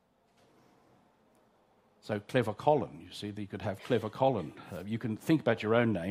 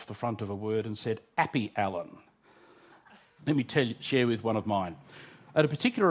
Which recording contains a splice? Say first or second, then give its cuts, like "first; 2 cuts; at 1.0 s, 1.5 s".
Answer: second; 1 cut; at 3.4 s